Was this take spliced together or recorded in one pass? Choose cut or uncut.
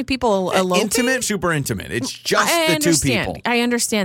cut